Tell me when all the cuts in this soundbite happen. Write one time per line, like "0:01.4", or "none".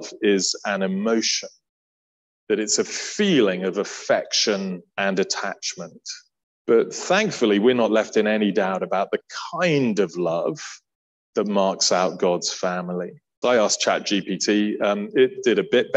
0:04.9
0:06.5
0:13.4